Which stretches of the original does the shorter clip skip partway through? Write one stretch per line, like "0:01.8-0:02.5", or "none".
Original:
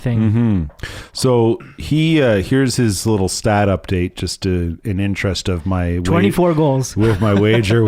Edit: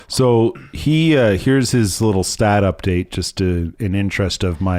none